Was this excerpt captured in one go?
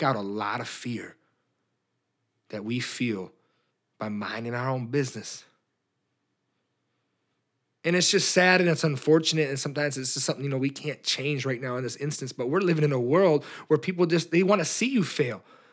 yes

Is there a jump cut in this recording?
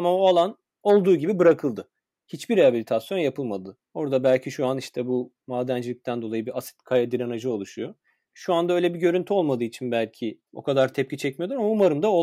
yes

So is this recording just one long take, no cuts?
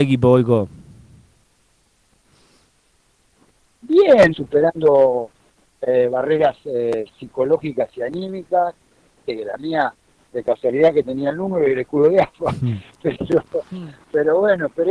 no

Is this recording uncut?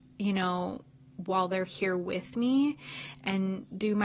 yes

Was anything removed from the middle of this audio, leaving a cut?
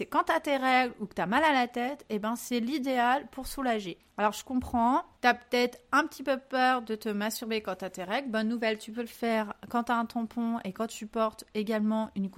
yes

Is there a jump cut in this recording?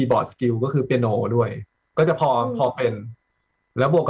no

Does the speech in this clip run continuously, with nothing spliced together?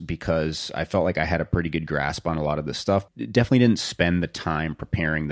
no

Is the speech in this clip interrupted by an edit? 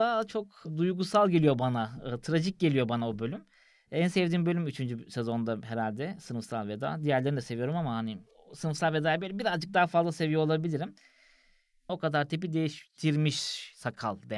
yes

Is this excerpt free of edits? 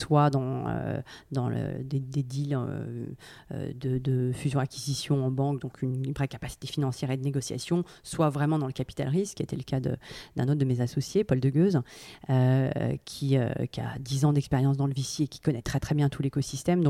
yes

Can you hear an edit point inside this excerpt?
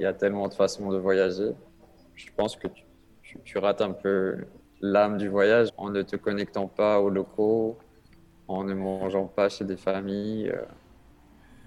yes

